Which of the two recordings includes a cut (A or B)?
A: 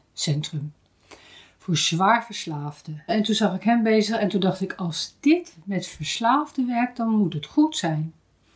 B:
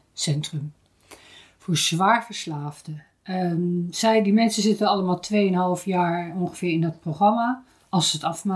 A